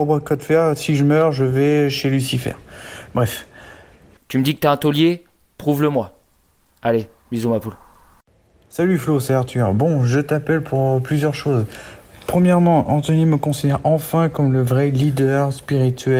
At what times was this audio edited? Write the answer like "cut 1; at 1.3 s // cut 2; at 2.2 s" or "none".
cut 1; at 4.2 s